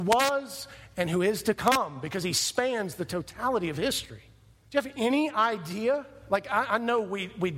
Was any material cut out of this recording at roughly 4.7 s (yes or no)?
yes